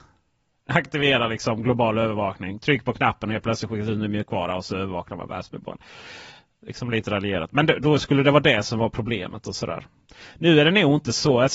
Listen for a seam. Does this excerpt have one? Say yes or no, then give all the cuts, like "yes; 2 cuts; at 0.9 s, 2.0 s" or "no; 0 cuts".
yes; 1 cut; at 7.8 s